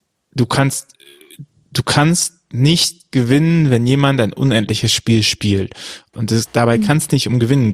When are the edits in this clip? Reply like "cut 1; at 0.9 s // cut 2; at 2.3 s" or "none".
cut 1; at 6.1 s